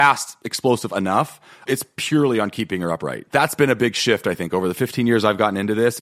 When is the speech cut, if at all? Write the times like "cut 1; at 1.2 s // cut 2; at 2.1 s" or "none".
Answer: none